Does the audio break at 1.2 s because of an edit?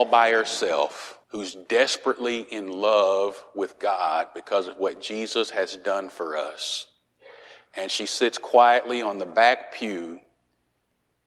yes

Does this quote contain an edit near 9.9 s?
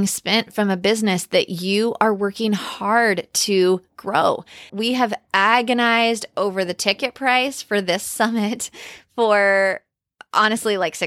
no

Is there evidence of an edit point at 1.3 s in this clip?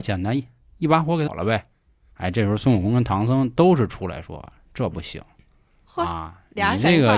yes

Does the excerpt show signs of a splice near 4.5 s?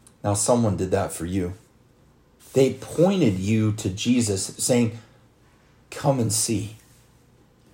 no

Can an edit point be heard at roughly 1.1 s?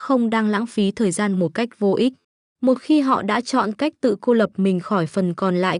no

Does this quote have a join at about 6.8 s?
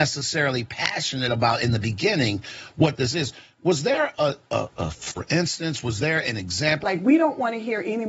yes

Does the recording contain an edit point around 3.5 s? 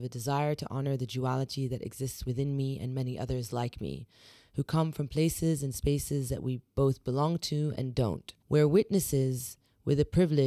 no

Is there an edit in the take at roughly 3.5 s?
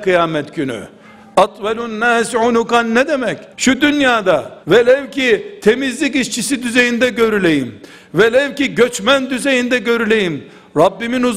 yes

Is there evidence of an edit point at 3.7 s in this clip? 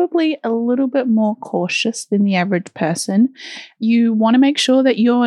no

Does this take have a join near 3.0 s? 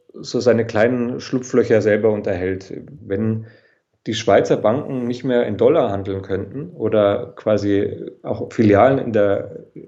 yes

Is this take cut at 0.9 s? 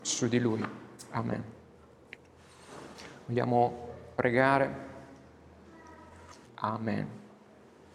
no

